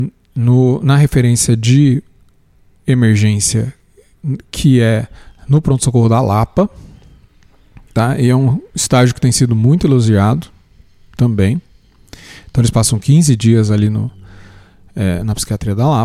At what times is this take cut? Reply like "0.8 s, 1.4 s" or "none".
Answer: none